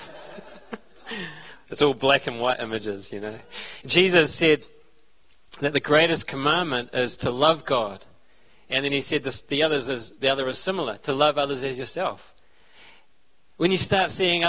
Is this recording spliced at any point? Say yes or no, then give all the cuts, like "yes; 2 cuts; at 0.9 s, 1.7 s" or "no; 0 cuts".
yes; 1 cut; at 3.8 s